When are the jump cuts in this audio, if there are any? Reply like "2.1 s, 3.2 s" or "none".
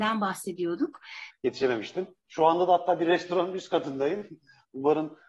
1.3 s